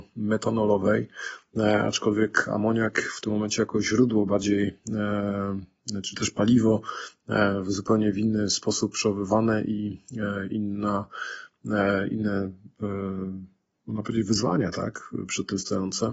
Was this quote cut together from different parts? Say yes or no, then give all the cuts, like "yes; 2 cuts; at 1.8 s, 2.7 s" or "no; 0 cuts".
no; 0 cuts